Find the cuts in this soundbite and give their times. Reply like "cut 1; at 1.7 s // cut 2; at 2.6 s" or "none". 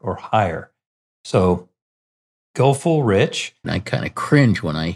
cut 1; at 3.6 s

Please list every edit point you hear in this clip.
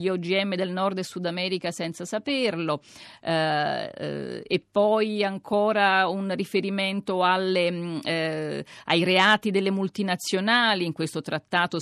none

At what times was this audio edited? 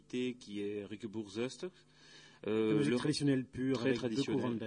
none

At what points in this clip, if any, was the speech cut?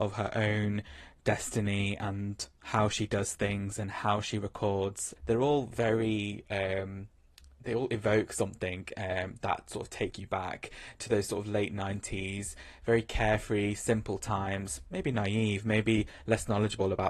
cut 1; at 5.2 s

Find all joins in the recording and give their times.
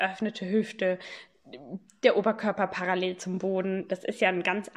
none

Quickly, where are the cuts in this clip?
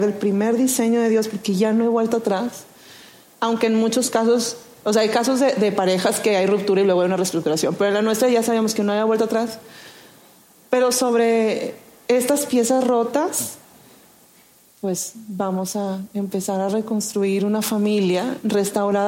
none

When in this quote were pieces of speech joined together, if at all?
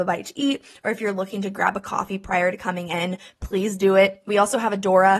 none

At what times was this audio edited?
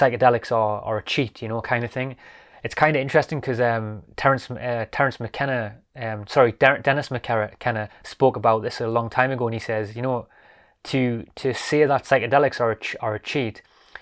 cut 1; at 7.9 s

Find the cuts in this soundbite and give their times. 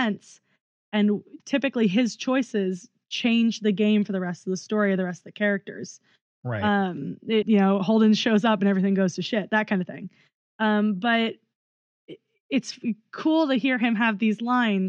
cut 1; at 7.4 s

